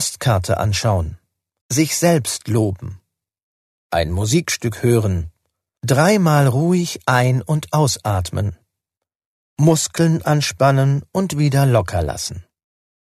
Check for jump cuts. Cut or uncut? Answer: cut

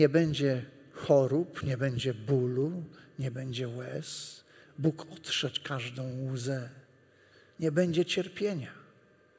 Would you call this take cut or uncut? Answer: uncut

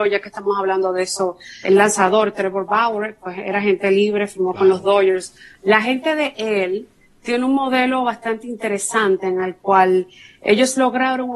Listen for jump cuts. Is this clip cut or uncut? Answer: cut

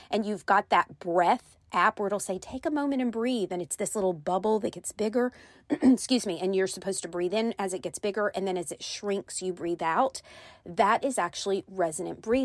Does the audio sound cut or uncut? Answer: uncut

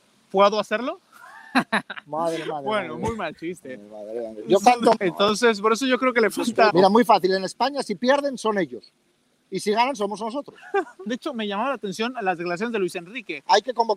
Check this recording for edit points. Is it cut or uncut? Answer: cut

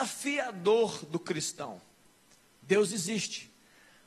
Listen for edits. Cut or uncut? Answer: cut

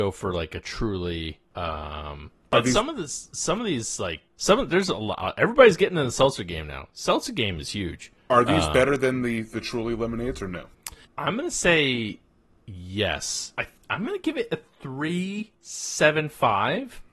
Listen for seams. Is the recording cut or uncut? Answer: cut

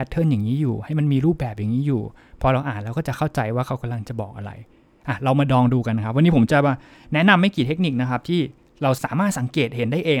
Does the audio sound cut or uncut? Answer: cut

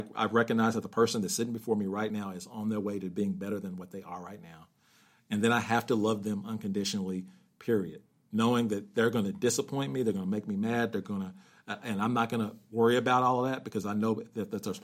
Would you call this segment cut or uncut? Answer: uncut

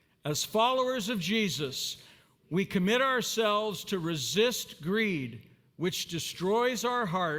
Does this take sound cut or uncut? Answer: uncut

